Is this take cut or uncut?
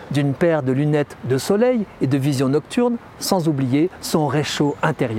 uncut